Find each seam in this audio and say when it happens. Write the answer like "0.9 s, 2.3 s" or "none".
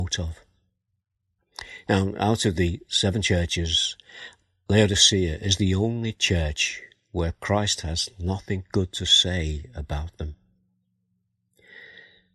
none

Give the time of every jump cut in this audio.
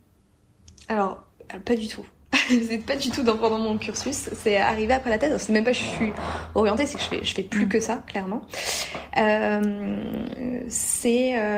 none

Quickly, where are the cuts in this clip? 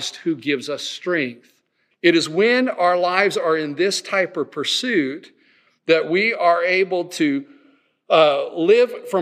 1.9 s

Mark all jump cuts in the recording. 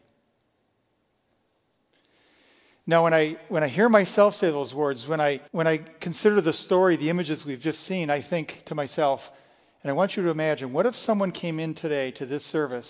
5.5 s

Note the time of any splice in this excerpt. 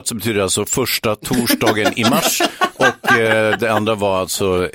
none

